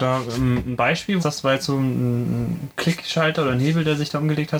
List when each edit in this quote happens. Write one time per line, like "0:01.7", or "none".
0:01.2